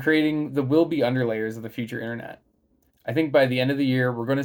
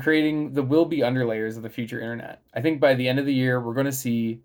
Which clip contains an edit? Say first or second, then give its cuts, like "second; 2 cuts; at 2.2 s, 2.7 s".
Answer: second; 1 cut; at 2.5 s